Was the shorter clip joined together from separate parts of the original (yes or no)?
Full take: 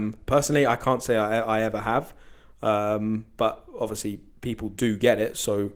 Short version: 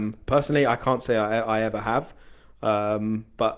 no